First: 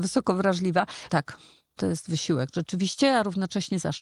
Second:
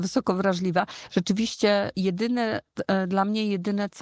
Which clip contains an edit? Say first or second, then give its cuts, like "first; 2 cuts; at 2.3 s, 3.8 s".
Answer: first; 1 cut; at 1.1 s